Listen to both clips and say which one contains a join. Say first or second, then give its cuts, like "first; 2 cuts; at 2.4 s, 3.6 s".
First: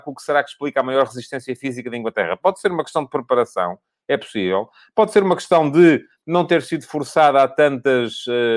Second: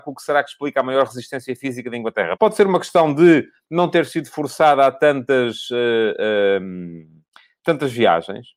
second; 1 cut; at 2.4 s